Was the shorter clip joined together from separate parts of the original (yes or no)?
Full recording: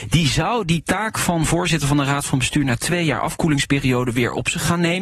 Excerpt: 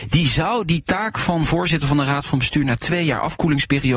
no